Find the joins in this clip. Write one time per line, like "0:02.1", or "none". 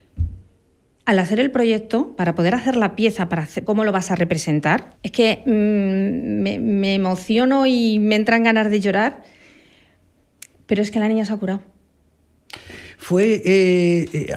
0:03.7
0:04.9